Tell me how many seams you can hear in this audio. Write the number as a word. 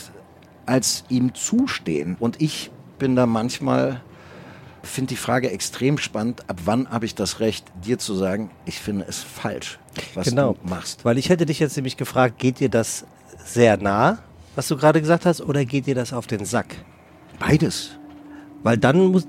one